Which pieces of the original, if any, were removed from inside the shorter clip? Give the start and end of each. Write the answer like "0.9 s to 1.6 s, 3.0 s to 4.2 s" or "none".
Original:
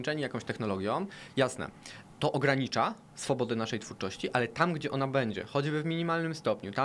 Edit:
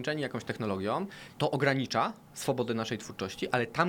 1.3 s to 2.2 s